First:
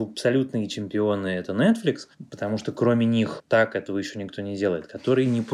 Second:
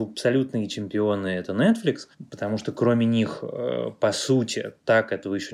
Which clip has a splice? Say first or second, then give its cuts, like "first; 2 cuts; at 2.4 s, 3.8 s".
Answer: first; 1 cut; at 3.4 s